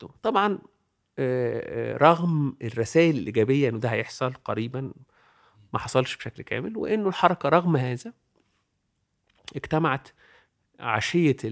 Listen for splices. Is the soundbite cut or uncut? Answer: uncut